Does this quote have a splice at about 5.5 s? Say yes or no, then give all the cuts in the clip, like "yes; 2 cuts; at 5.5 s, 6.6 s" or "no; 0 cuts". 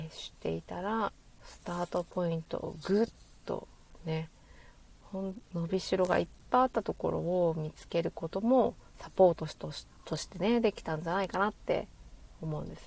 yes; 1 cut; at 5.5 s